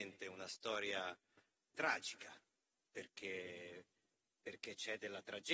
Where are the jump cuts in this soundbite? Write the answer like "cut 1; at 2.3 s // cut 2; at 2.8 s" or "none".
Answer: cut 1; at 1.7 s